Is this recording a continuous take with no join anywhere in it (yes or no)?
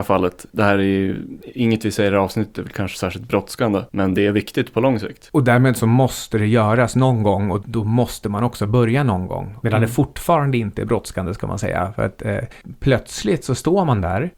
no